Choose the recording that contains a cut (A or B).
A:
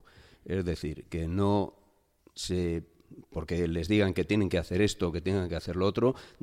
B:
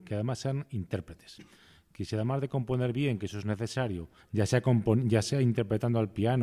B